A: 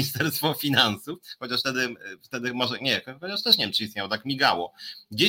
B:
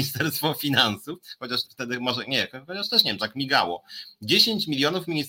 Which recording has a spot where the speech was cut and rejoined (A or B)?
B